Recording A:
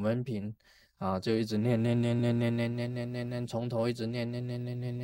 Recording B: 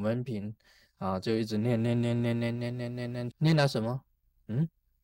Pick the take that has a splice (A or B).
B